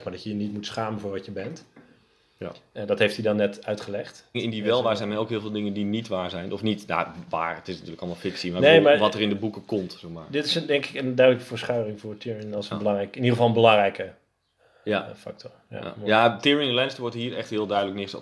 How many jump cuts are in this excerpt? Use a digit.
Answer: 1